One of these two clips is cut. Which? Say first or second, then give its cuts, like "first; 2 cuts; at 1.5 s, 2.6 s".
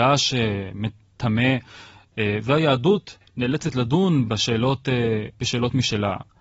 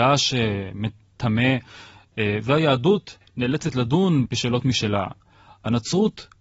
second; 1 cut; at 4.3 s